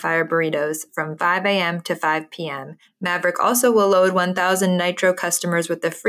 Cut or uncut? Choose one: cut